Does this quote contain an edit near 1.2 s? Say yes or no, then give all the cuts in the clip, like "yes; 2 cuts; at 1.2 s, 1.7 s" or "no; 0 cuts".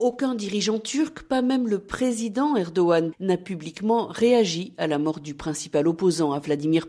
no; 1 cut; at 3.1 s